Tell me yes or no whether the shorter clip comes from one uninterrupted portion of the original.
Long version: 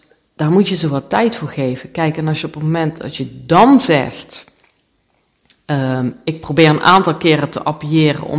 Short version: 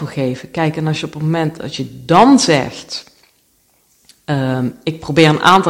yes